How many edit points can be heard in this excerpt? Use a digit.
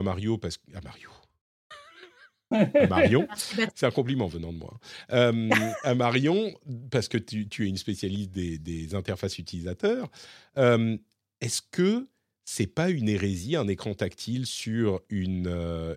1